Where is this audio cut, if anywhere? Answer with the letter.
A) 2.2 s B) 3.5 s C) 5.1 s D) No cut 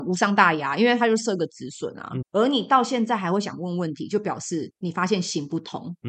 A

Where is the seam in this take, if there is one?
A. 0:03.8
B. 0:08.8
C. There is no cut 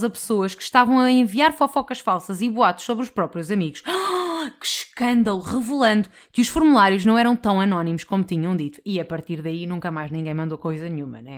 C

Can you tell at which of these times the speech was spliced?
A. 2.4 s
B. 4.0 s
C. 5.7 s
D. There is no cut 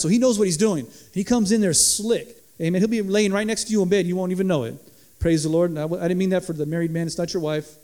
A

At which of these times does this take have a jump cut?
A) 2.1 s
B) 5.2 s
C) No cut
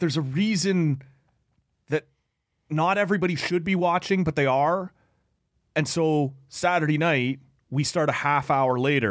C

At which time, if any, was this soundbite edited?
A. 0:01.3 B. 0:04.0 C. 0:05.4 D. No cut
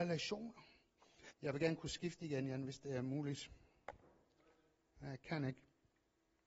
A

